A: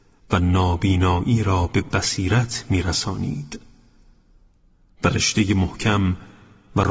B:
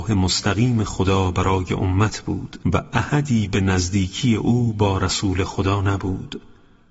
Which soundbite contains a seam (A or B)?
B